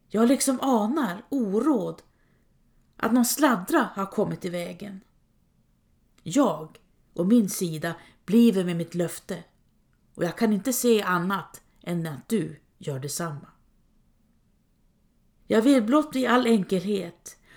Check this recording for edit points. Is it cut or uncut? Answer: cut